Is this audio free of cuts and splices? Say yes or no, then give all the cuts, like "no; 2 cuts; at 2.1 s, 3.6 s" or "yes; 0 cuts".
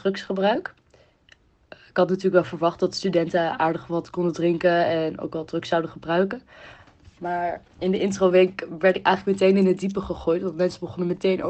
yes; 0 cuts